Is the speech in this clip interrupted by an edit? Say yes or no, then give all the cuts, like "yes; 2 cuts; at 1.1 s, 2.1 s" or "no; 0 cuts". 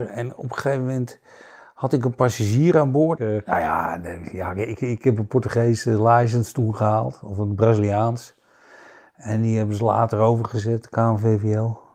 yes; 1 cut; at 3.2 s